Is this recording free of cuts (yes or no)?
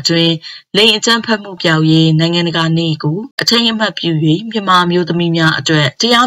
no